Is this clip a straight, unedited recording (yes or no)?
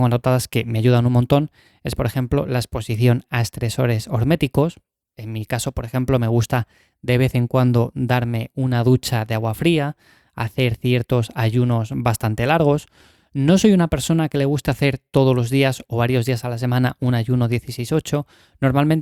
yes